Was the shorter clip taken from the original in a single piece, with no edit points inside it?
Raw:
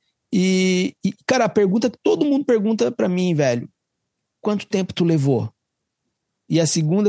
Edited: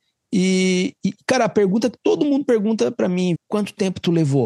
no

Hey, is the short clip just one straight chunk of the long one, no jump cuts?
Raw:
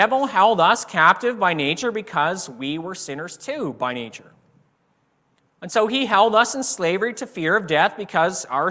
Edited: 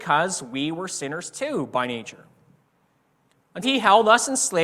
no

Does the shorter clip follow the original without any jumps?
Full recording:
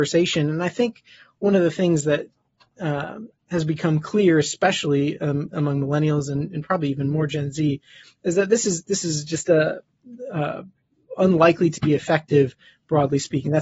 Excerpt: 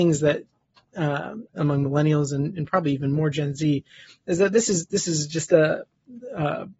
no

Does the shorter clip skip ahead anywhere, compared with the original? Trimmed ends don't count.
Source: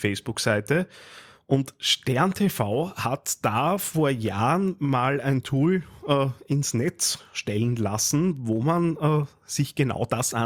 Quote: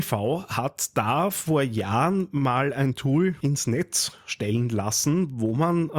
yes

